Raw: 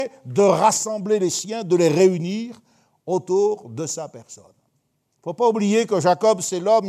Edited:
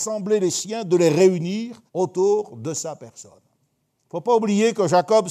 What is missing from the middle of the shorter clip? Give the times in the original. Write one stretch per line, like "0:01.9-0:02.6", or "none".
0:02.7-0:03.0